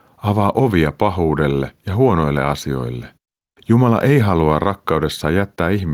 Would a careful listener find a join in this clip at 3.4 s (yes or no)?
no